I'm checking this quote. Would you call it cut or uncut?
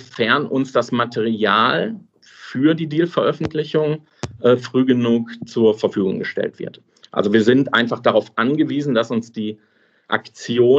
uncut